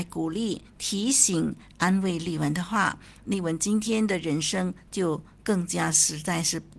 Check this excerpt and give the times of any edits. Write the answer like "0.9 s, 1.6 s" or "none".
3.3 s

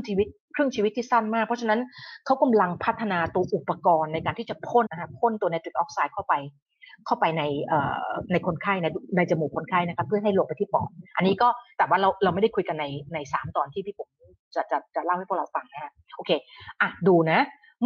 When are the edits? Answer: 4.9 s

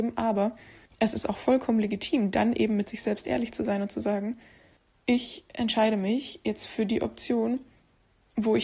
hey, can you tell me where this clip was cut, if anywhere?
none

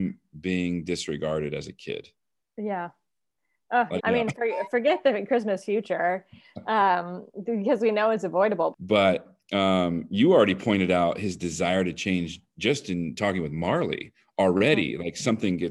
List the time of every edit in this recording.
4.0 s, 8.7 s

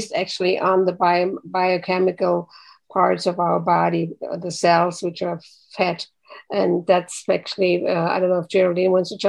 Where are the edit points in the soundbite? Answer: none

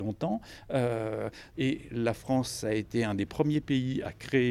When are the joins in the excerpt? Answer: 1.5 s

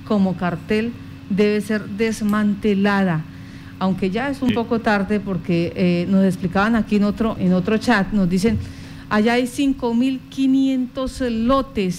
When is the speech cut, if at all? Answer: 7.4 s

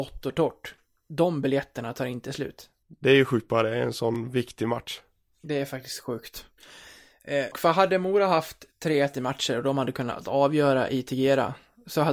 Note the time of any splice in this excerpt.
2.8 s, 7.5 s

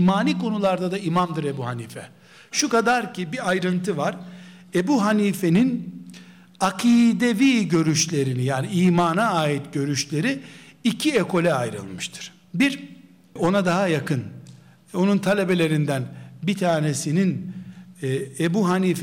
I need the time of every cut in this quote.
13.4 s

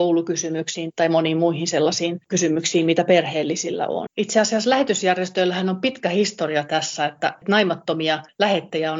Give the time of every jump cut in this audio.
0.9 s, 4.1 s

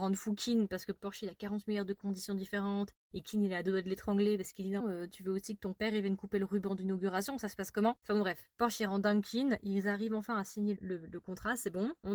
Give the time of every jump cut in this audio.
4.8 s, 10.8 s

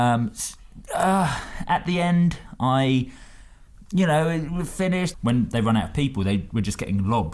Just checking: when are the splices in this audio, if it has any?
5.1 s

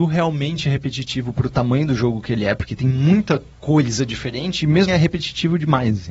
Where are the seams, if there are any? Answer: 3.5 s, 4.9 s

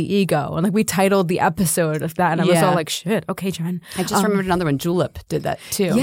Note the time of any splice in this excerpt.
none

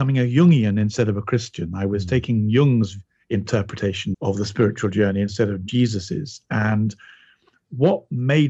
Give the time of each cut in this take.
4.1 s

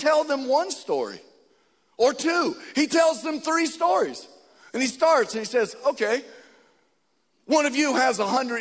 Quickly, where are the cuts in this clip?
none

